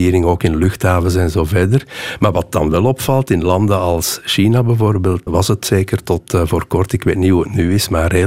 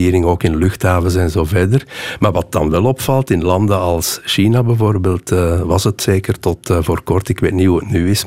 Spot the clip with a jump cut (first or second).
first